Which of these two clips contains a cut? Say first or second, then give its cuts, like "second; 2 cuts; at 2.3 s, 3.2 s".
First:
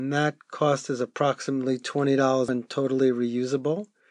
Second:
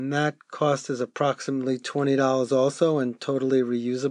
first; 1 cut; at 2.5 s